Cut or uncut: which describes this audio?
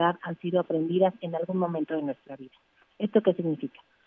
uncut